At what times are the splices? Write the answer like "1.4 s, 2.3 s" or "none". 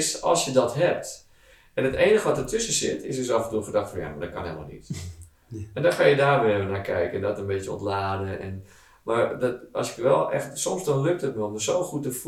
none